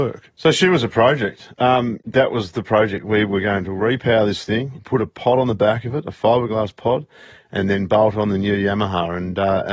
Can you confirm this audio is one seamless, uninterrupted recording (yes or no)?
yes